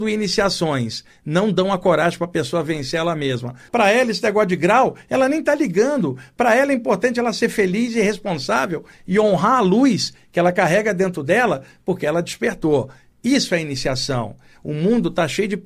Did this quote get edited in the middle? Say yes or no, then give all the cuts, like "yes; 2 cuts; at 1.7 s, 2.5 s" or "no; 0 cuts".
yes; 1 cut; at 3.7 s